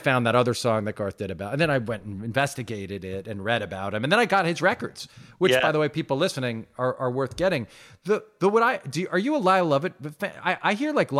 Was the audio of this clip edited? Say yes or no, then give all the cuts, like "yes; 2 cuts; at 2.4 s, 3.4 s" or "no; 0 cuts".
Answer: no; 0 cuts